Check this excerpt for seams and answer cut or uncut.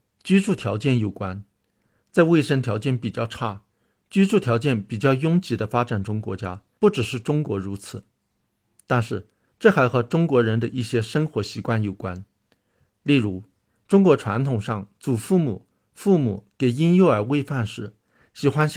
cut